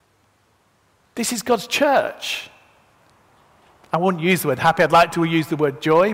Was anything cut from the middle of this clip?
no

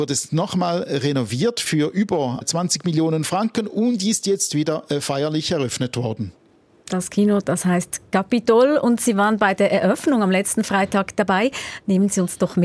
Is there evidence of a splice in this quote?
no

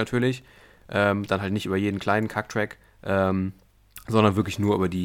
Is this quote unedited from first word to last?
yes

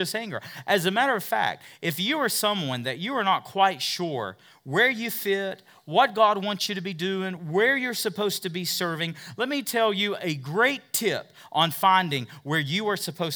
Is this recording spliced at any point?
no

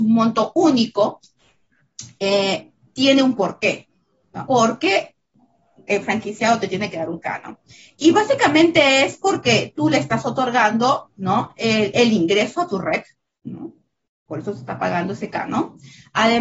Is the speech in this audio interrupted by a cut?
yes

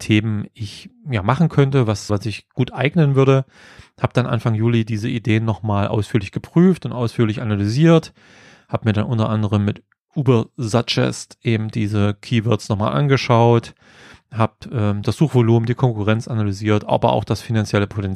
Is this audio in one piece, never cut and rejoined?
no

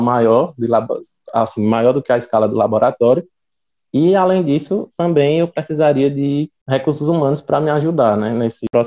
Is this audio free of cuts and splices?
yes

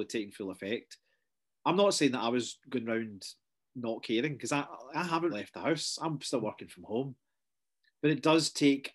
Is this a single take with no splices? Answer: no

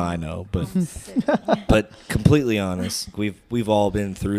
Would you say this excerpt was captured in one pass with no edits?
no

